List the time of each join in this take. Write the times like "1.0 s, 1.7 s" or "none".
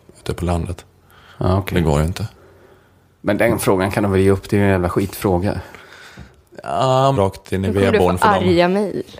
7.1 s